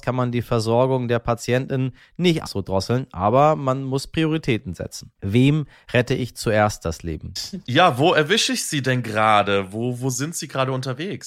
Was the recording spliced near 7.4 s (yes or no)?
yes